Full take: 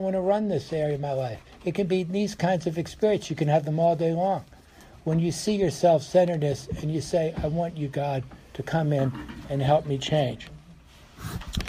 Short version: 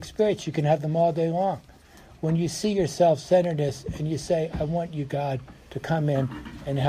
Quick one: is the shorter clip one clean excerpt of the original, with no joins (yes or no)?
yes